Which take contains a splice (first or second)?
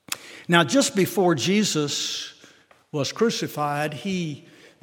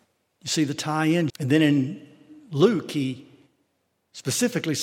second